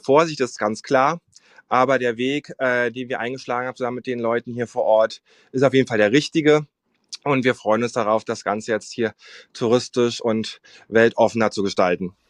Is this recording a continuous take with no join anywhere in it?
yes; 0 cuts

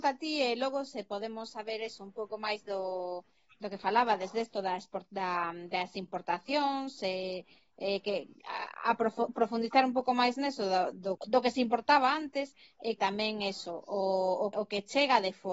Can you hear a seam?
yes; 3 cuts; at 11.2 s, 13.0 s, 14.5 s

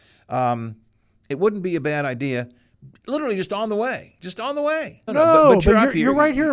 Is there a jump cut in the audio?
yes; 1 cut; at 5.1 s

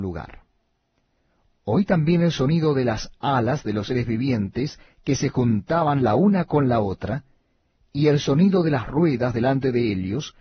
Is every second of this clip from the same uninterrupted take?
yes; 0 cuts

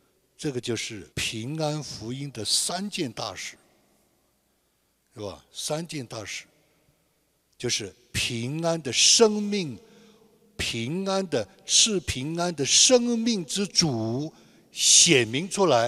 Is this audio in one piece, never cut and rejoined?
no; 1 cut; at 1.1 s

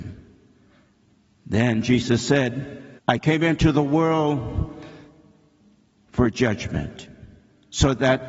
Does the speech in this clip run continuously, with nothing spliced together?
no; 1 cut; at 3.0 s

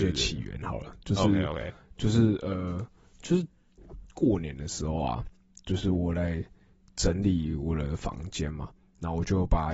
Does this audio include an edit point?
no; 0 cuts

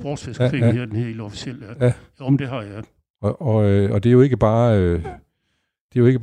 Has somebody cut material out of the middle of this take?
no; 0 cuts

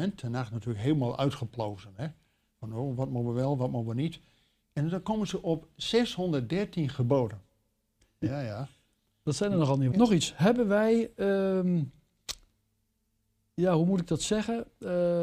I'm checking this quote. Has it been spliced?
yes; 1 cut; at 9.9 s

